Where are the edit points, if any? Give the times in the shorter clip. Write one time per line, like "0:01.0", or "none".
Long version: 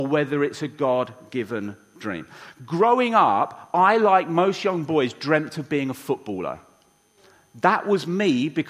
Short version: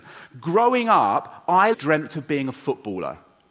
0:01.7